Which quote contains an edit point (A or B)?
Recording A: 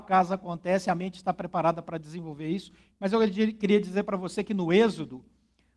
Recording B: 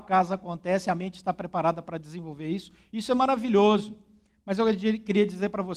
A